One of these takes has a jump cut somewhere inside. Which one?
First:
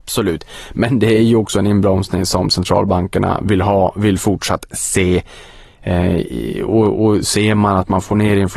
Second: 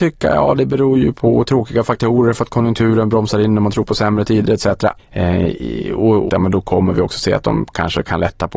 second; 2 cuts; at 5.0 s, 6.3 s

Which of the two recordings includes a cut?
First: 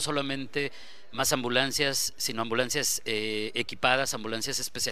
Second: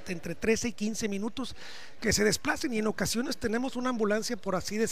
second; 1 cut; at 2.0 s

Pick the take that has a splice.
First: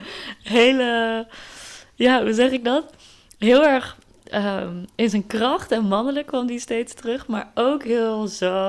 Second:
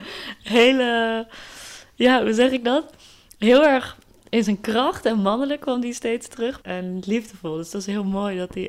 second; 2 cuts; at 4.3 s, 6.6 s

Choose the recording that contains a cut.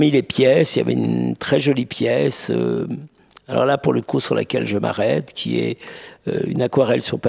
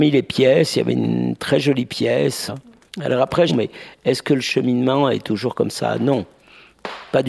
second; 2 cuts; at 2.5 s, 3.5 s

